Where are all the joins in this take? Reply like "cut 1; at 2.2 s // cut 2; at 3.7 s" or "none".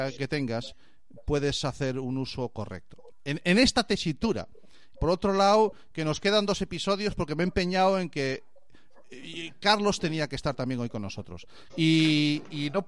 cut 1; at 4.9 s // cut 2; at 11.7 s